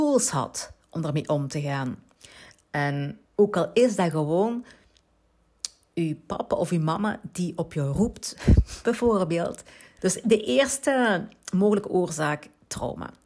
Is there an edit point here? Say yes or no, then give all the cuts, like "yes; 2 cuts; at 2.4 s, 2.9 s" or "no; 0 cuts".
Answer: yes; 2 cuts; at 3.2 s, 10.0 s